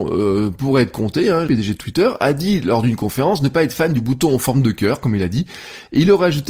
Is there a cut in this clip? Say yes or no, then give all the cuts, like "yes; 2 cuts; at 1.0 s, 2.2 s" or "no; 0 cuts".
yes; 1 cut; at 1.5 s